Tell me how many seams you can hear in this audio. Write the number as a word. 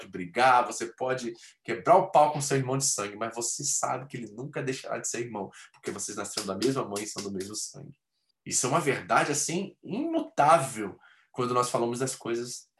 one